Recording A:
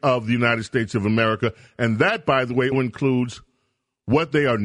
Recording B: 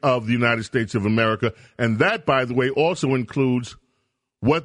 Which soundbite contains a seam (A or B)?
A